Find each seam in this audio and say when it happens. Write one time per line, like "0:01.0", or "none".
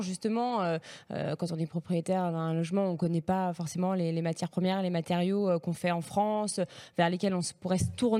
none